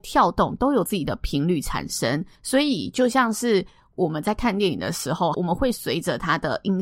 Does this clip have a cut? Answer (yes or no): yes